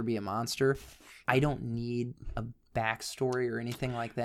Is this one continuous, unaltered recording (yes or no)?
yes